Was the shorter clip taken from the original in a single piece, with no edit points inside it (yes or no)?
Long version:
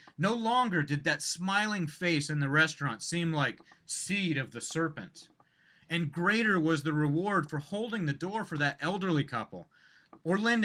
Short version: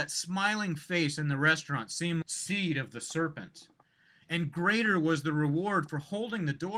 no